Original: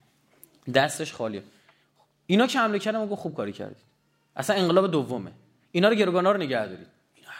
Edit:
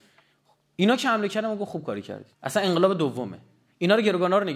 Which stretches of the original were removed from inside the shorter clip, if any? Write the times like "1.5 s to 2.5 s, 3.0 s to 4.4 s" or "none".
3.8 s to 4.3 s